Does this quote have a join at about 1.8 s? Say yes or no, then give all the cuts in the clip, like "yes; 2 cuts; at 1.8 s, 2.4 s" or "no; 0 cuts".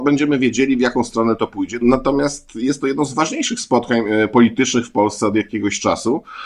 yes; 1 cut; at 1.8 s